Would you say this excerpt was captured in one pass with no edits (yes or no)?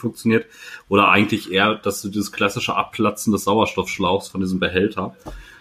yes